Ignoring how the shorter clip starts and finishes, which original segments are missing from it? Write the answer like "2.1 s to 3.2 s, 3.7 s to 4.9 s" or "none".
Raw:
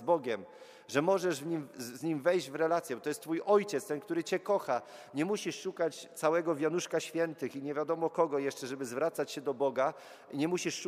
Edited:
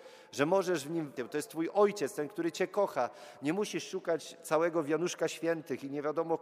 1.7 s to 2.9 s